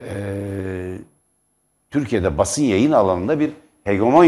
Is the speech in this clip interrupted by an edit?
no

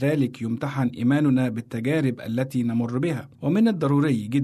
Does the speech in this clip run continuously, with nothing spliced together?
no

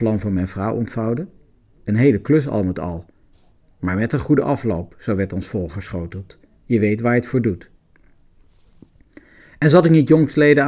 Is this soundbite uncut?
yes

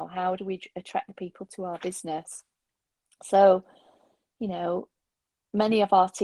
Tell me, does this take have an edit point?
no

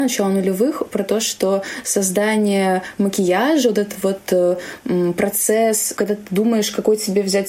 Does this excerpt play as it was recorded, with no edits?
yes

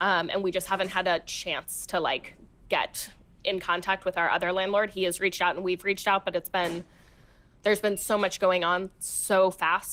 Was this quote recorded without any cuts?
yes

